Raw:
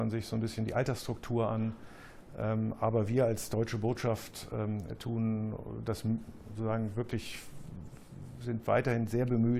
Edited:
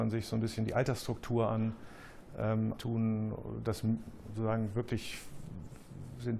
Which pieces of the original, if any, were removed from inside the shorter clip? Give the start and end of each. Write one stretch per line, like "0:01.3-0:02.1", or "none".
0:02.8-0:05.0